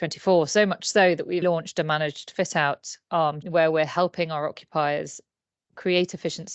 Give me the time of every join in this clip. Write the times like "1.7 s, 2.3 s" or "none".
1.4 s, 3.4 s

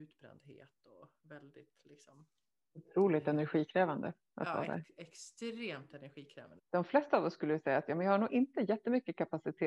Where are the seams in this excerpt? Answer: 6.6 s

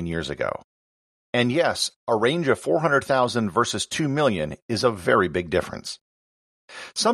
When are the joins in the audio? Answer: none

